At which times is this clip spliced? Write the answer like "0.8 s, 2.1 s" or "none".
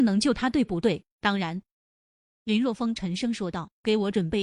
none

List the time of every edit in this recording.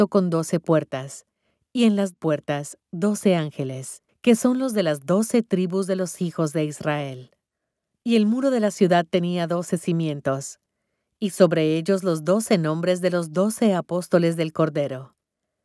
4.1 s

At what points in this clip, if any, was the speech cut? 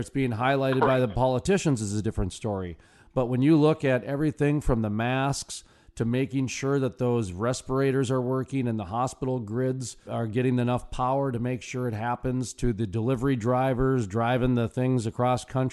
10.0 s

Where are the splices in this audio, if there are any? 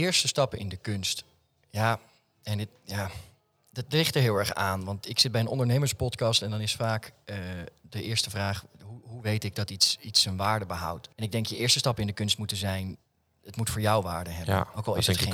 11.1 s

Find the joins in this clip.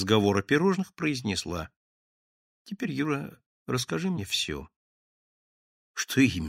none

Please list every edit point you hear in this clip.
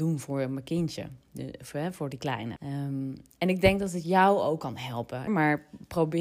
2.6 s, 5.3 s

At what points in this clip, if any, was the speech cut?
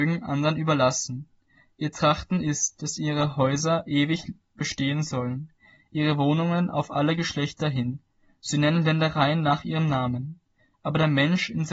none

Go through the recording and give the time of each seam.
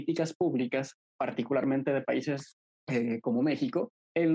none

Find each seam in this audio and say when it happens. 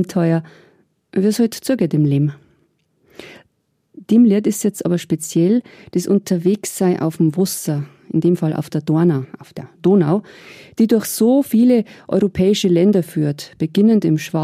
none

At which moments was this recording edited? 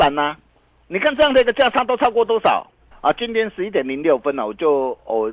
2.9 s

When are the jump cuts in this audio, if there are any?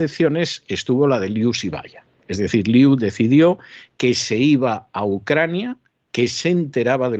none

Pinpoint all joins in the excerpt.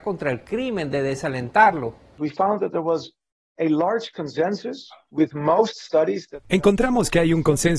none

